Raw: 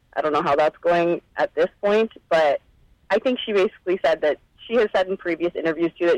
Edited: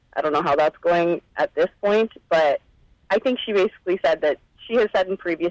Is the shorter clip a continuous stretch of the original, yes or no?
yes